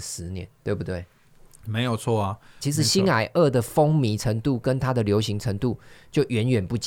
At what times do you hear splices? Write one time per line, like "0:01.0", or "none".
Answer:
0:02.6